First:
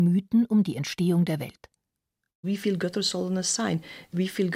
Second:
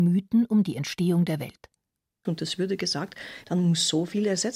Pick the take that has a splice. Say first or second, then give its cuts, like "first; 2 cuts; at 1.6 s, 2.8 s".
second; 2 cuts; at 2.3 s, 3.4 s